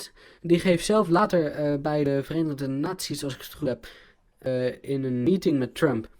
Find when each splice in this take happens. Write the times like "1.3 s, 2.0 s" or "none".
none